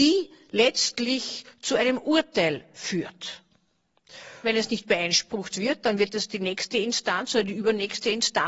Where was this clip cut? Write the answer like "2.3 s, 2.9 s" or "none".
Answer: 4.4 s